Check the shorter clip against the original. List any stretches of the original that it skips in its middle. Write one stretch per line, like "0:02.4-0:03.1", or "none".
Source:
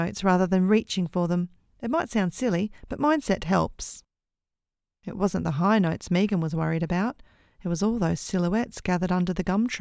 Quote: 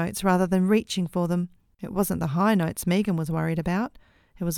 0:01.7-0:05.0